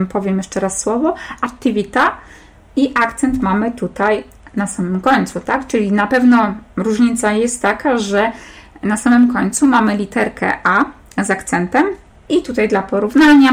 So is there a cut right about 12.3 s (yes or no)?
yes